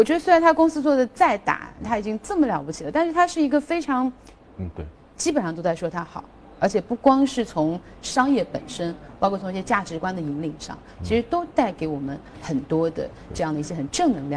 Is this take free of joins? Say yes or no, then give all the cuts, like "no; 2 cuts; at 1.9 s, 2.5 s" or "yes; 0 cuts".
no; 1 cut; at 4.4 s